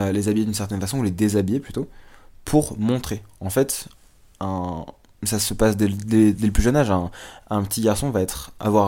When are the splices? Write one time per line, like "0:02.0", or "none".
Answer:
none

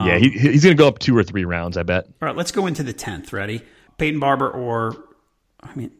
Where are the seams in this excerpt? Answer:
0:03.9

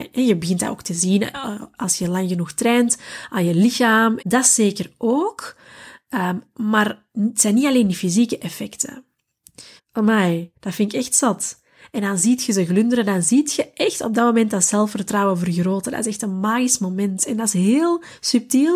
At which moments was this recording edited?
0:04.2
0:09.8

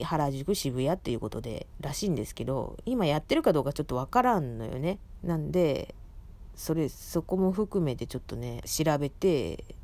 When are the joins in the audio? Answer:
0:05.2
0:06.5
0:08.6

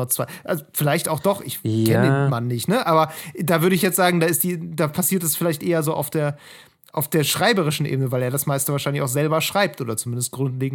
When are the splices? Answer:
none

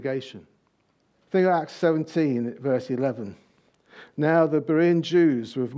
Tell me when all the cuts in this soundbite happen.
0:01.1

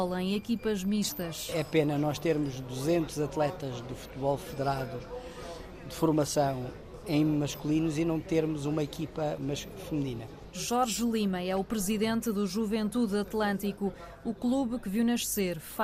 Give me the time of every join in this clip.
none

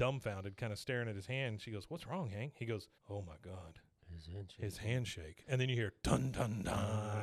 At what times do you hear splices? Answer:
0:03.0

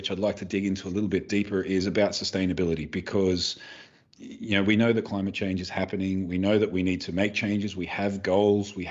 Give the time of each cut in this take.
none

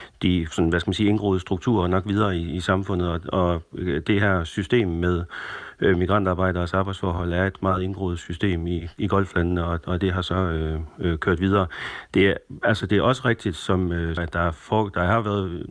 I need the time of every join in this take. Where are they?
0:14.2

